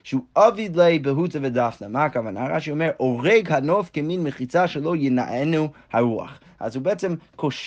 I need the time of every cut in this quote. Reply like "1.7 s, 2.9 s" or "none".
none